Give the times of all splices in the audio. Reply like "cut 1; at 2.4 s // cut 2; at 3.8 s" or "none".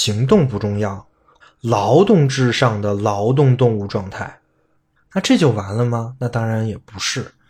cut 1; at 1.4 s